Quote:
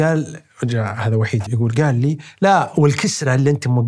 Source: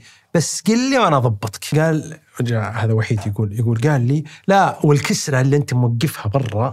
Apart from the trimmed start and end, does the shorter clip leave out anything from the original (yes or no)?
yes